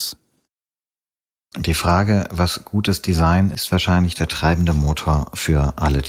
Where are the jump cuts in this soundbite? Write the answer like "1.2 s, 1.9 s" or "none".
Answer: 1.5 s